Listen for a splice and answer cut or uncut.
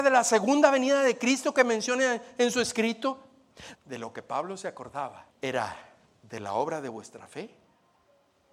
cut